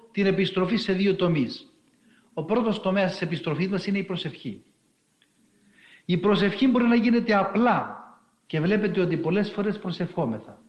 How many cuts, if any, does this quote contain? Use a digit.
1